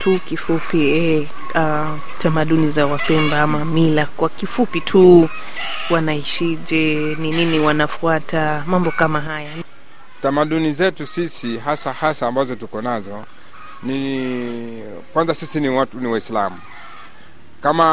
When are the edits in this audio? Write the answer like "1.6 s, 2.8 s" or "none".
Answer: none